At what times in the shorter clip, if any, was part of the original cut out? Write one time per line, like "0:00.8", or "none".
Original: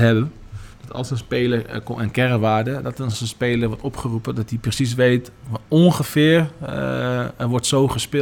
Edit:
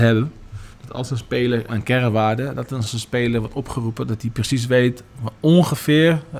0:01.7

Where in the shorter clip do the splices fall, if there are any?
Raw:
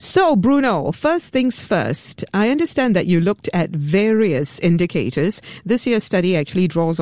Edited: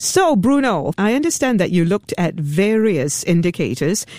0:00.9

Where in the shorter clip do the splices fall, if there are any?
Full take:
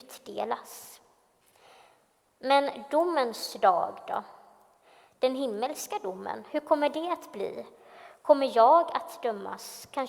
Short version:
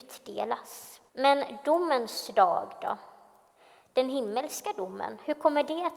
0:01.1

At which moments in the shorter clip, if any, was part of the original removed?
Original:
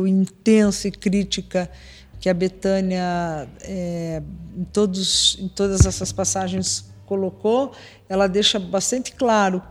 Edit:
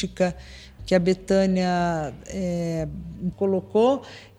0:03.3

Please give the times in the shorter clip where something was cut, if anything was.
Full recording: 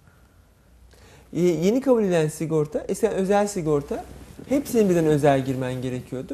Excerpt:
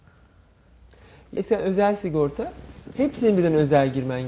0:01.3

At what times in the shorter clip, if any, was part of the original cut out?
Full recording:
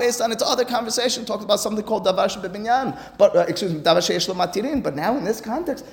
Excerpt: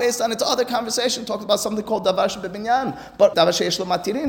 0:03.3

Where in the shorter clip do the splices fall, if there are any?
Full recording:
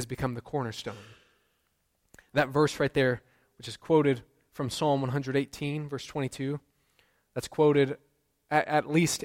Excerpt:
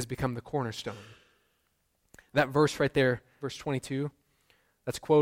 0:03.4

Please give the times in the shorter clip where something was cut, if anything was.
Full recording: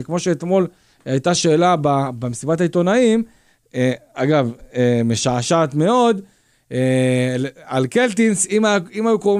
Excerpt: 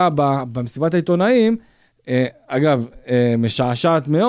none

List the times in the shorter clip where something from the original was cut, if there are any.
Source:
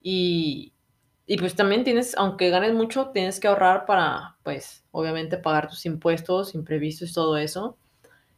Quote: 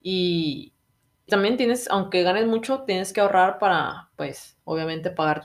0:01.3

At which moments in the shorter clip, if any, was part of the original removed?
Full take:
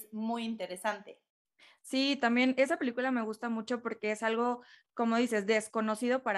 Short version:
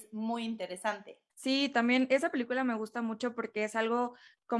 0:01.3

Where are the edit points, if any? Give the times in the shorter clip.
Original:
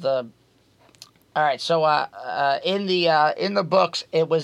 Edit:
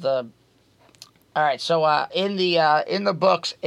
0:02.1

